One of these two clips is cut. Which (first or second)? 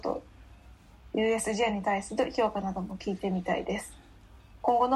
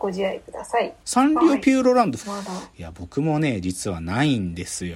second